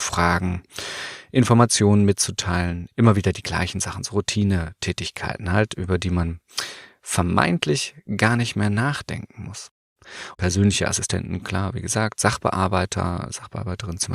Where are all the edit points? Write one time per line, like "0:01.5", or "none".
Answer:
0:10.3